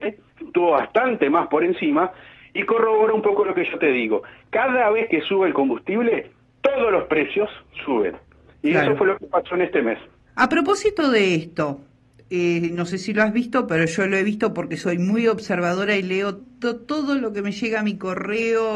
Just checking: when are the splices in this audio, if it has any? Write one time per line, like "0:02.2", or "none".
0:16.4